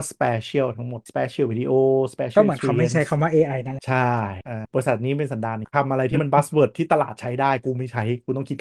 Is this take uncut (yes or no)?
yes